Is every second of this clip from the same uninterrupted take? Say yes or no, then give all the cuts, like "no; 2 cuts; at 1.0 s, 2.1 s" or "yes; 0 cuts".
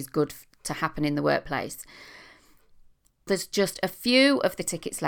no; 1 cut; at 3.3 s